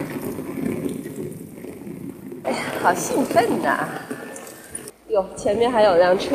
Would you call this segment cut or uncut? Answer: cut